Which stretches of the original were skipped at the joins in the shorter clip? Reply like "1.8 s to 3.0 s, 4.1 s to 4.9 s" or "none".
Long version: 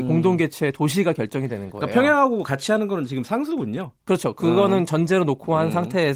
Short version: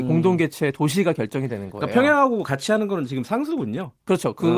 none